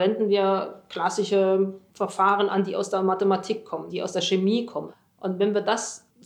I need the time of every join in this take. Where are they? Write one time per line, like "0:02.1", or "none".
0:03.9